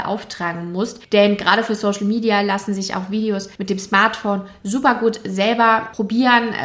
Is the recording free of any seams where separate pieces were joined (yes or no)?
yes